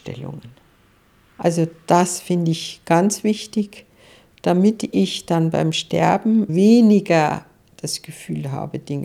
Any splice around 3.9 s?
no; 2 cuts; at 1.3 s, 6.5 s

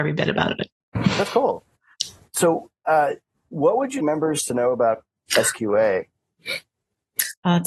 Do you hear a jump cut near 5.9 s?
no; 2 cuts; at 1.9 s, 4.0 s

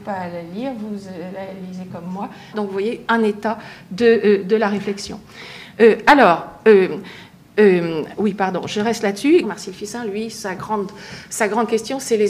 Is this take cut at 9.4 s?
yes; 2 cuts; at 2.5 s, 9.4 s

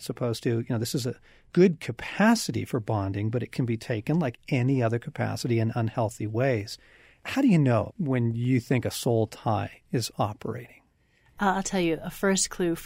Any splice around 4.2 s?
no; 1 cut; at 7.9 s

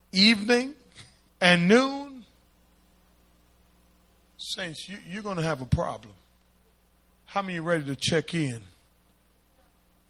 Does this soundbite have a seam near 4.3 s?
no; 1 cut; at 1.3 s

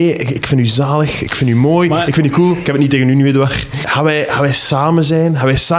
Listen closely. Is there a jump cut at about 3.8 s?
yes; 1 cut; at 3.8 s

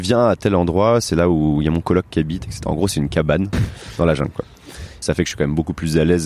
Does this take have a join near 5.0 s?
yes; 2 cuts; at 3.5 s, 5.0 s

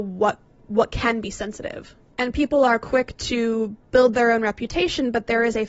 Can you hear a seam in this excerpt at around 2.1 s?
yes; 1 cut; at 2.1 s

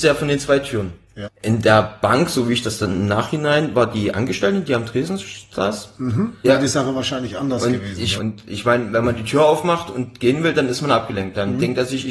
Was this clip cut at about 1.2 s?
yes; 3 cuts; at 1.2 s, 6.4 s, 8.2 s

